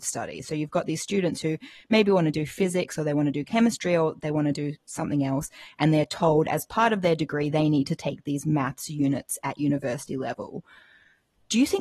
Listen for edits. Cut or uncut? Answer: uncut